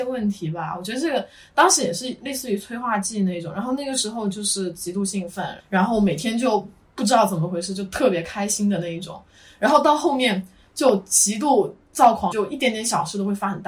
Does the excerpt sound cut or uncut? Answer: cut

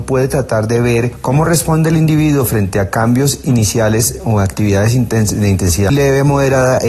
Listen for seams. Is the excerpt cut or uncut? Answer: cut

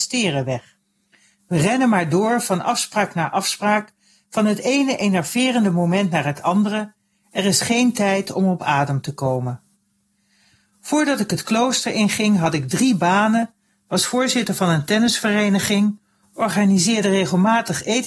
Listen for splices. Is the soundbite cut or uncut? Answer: uncut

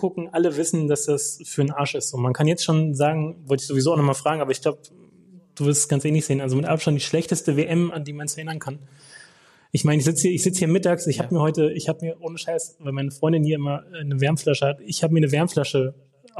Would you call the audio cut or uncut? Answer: uncut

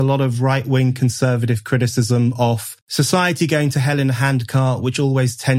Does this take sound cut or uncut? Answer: cut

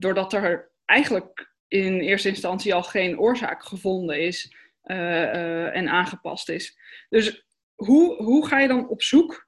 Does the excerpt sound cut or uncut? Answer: cut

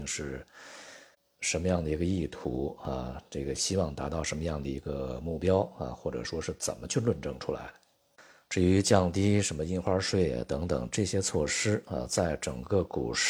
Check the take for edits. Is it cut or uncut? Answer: uncut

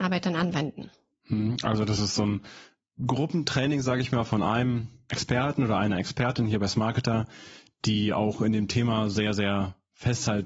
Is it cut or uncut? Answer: uncut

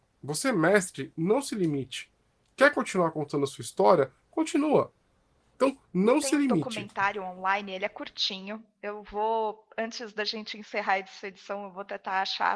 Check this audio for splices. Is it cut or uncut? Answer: cut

